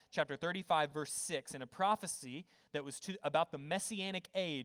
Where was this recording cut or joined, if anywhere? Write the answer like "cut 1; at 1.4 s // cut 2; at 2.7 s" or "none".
none